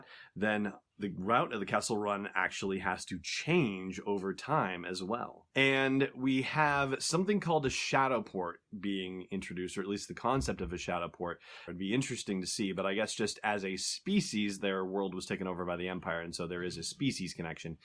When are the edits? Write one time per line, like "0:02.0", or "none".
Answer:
0:05.5
0:11.7